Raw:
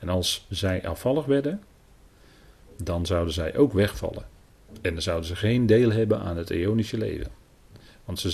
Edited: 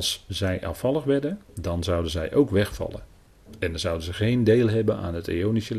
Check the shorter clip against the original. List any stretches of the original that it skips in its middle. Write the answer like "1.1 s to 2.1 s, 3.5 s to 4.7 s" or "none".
1.7 s to 2.7 s